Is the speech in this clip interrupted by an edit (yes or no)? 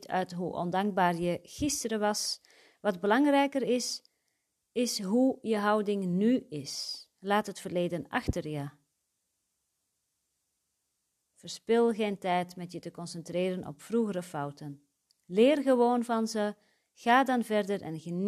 no